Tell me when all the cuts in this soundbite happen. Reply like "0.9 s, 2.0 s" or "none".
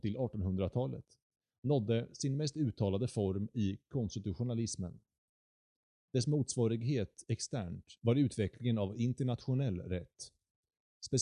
8.0 s

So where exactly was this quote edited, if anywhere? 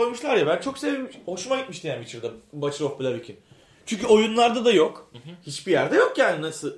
none

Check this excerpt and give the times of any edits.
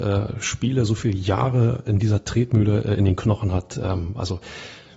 none

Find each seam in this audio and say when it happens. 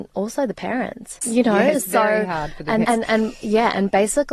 1.2 s, 2.8 s

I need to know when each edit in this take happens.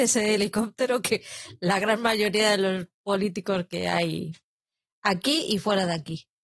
2.9 s

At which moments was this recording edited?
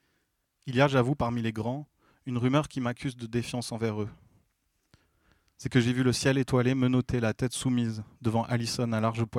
none

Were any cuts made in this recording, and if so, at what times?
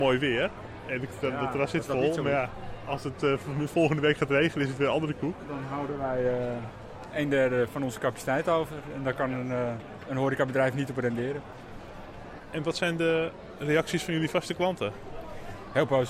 10.0 s

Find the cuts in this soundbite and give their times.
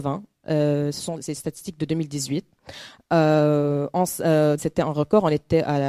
4.6 s

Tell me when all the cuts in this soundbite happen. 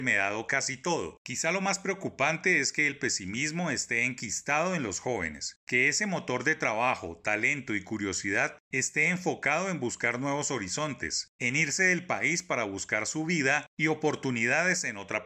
1.2 s

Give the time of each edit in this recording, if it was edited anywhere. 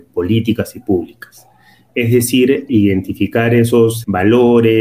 2.7 s

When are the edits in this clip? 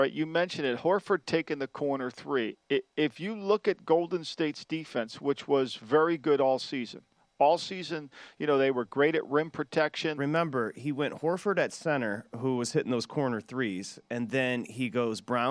10.2 s

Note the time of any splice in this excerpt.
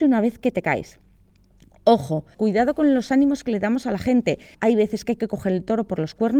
2.3 s, 4.5 s

